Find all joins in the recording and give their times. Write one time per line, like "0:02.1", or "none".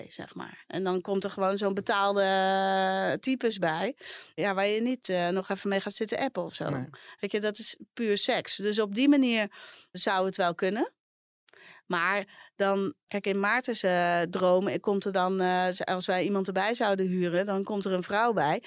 none